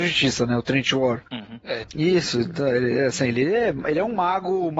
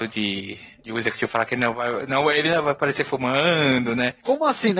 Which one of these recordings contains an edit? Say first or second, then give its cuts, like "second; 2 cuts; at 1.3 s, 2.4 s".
first; 1 cut; at 1.8 s